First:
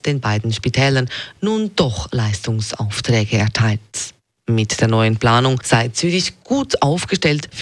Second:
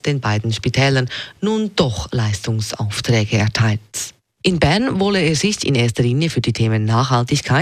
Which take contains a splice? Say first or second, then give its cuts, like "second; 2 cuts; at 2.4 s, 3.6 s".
second; 1 cut; at 4.4 s